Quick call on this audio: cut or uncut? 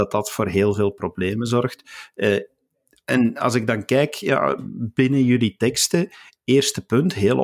uncut